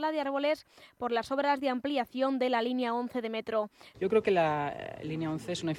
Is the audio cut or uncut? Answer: cut